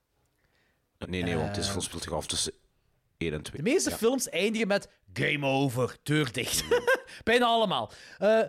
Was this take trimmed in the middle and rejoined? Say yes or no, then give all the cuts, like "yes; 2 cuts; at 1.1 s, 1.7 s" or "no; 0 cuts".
yes; 2 cuts; at 1.0 s, 3.5 s